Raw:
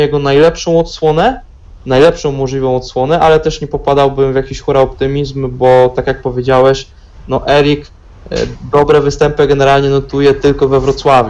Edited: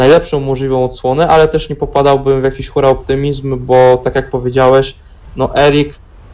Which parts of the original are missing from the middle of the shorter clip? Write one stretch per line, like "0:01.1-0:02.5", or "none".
none